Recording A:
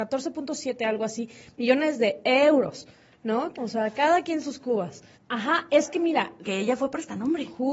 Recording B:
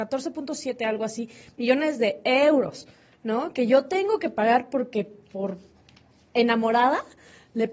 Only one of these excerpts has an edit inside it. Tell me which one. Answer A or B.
A